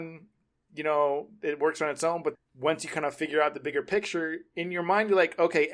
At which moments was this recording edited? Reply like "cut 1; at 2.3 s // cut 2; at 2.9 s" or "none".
cut 1; at 2.4 s